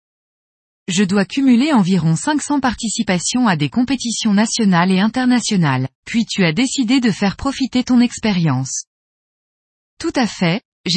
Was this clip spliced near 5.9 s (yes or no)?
yes